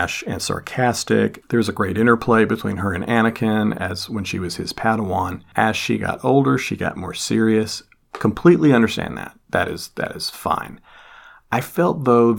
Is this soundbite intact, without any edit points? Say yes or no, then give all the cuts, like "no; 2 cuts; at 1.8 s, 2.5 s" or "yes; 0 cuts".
yes; 0 cuts